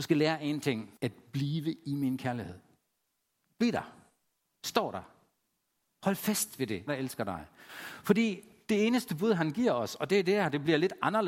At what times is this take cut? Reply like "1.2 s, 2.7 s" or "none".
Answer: 1.0 s, 6.9 s